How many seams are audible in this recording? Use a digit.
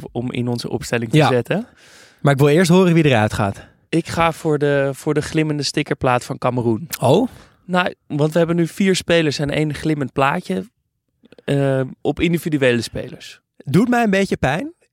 1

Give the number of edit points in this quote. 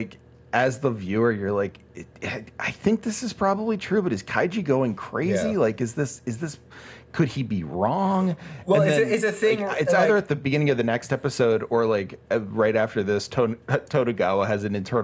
0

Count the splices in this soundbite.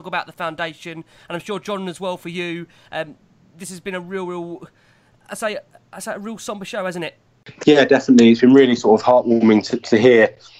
0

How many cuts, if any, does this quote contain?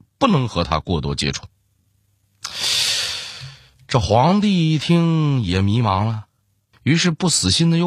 1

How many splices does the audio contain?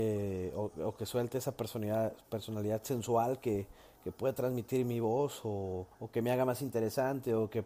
1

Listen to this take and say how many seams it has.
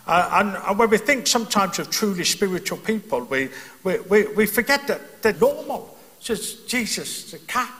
1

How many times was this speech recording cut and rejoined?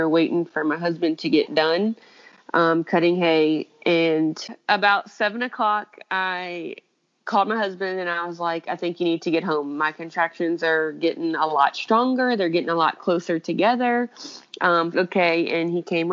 1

